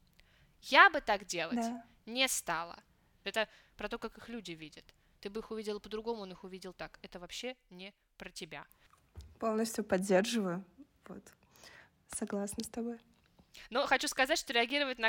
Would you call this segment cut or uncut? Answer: cut